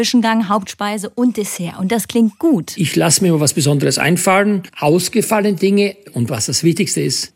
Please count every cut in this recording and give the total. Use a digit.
0